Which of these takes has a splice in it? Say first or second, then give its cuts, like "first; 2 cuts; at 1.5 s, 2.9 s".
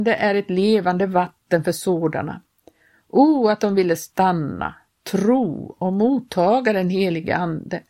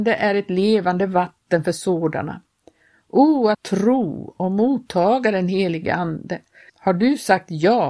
second; 2 cuts; at 3.5 s, 6.7 s